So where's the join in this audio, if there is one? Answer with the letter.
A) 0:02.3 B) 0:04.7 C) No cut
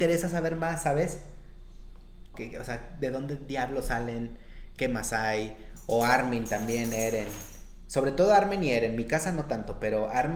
A